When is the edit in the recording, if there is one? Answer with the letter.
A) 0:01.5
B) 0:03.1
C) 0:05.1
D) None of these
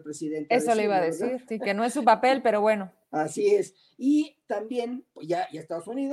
A